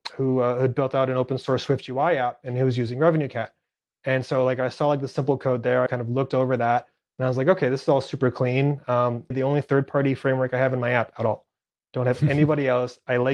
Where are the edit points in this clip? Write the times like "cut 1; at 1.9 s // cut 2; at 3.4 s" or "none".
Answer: cut 1; at 5.9 s // cut 2; at 9.3 s